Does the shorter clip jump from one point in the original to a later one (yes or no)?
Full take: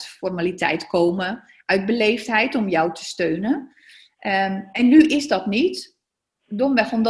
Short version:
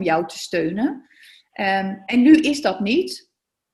no